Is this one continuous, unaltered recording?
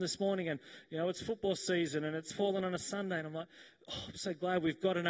yes; 0 cuts

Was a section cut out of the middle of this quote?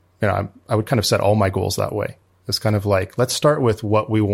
no; 0 cuts

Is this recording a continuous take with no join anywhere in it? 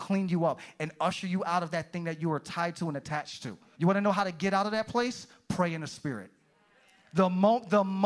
no; 1 cut; at 3.7 s

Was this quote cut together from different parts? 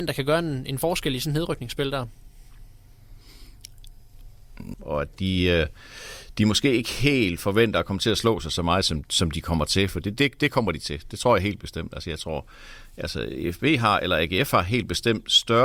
yes; 2 cuts; at 4.7 s, 9.0 s

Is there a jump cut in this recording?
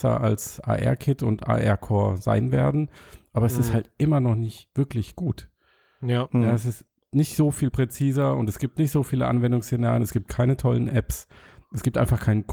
no; 0 cuts

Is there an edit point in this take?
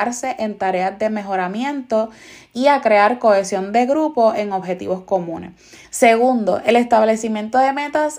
yes; 1 cut; at 5.8 s

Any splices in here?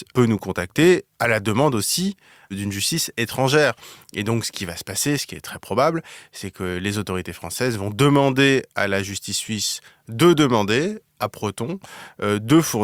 yes; 1 cut; at 1.1 s

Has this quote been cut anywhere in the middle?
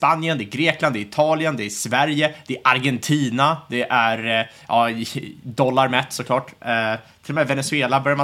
no; 0 cuts

